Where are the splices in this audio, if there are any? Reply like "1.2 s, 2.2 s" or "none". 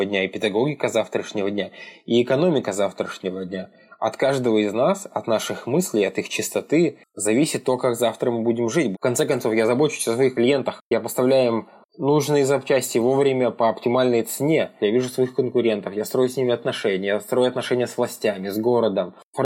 8.9 s, 14.8 s